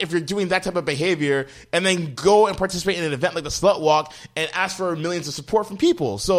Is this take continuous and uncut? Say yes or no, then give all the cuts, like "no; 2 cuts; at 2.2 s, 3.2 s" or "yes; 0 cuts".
yes; 0 cuts